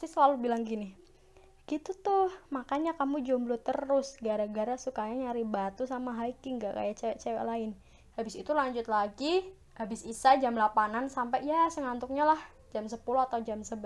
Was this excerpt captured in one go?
no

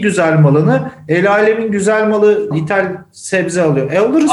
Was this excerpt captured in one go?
no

